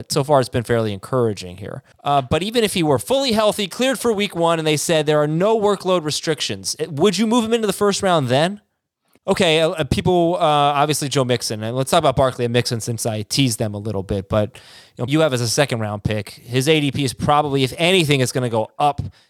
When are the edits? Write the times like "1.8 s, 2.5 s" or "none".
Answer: 1.9 s, 9.2 s, 15.1 s